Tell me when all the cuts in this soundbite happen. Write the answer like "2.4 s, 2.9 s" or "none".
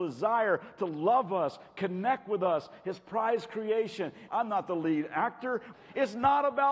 4.3 s, 5.7 s